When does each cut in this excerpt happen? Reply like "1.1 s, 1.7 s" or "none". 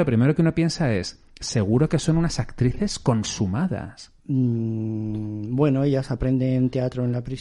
4.2 s